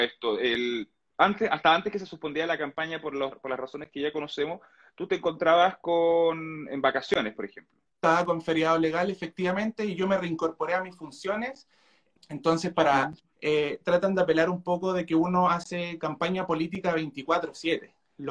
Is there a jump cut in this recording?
yes; 2 cuts; at 12.2 s, 13.3 s

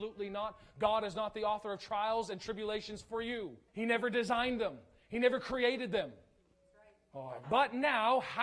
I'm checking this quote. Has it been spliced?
yes; 2 cuts; at 3.7 s, 7.4 s

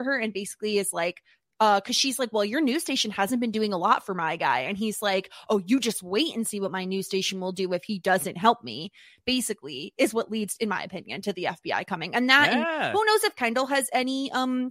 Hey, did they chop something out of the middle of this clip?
no; 0 cuts

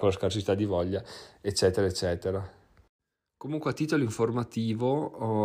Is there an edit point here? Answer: no; 0 cuts

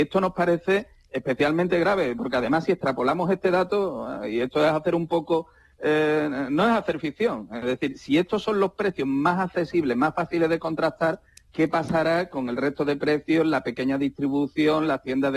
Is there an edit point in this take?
no; 0 cuts

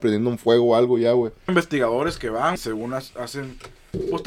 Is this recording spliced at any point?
yes; 2 cuts; at 1.5 s, 2.6 s

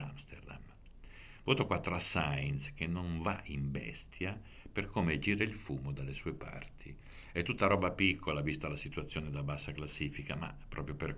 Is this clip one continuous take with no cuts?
yes; 0 cuts

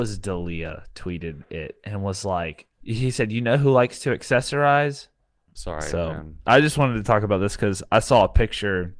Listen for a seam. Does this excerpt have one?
yes; 2 cuts; at 2.8 s, 5.6 s

